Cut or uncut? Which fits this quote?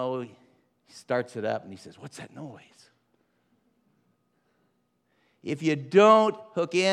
uncut